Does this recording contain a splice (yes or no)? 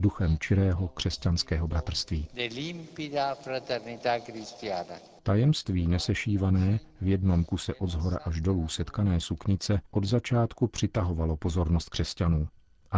yes